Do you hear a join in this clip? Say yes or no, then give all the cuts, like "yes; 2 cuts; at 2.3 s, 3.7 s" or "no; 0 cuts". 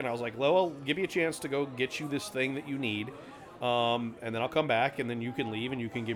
no; 0 cuts